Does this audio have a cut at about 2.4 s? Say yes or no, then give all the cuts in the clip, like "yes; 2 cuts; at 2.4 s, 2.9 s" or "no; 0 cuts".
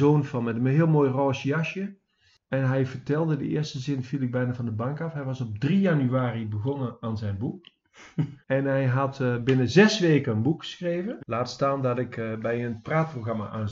no; 2 cuts; at 8.4 s, 11.2 s